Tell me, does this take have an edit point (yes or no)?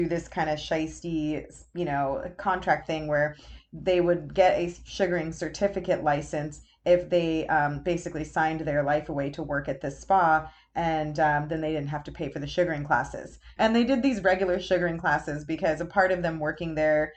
yes